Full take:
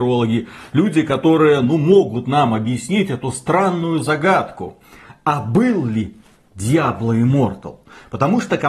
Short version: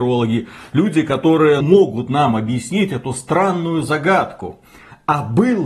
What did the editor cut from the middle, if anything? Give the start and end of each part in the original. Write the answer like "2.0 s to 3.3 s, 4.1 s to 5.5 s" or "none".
1.6 s to 1.8 s